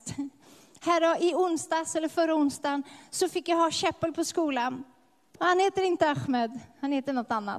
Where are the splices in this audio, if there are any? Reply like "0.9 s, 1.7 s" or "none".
5.4 s